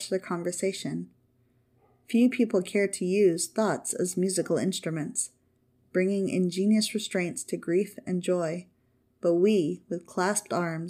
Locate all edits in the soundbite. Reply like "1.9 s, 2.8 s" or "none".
none